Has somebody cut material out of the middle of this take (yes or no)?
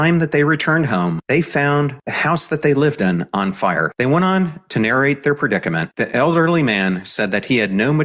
yes